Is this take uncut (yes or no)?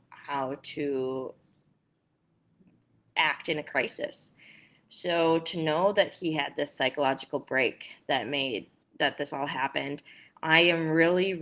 no